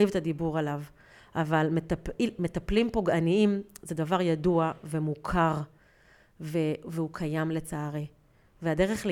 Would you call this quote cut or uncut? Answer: uncut